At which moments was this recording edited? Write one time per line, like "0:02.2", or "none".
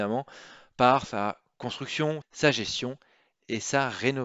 0:02.2